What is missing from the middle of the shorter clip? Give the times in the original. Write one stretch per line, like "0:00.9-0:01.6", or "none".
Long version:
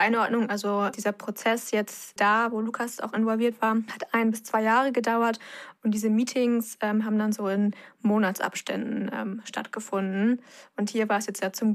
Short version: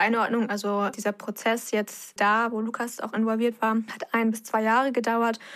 none